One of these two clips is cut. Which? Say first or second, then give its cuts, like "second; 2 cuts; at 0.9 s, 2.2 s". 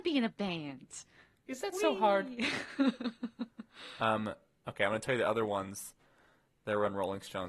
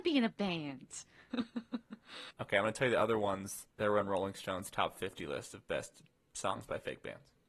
second; 3 cuts; at 1.3 s, 2.3 s, 3.7 s